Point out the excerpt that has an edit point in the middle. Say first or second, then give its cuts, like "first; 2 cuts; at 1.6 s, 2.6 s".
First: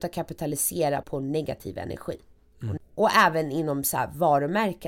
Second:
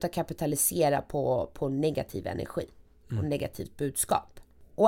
first; 2 cuts; at 1.0 s, 2.8 s